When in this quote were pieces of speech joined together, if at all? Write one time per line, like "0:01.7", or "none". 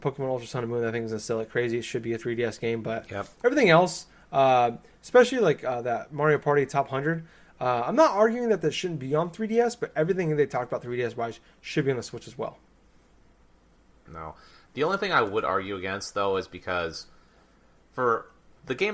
0:14.1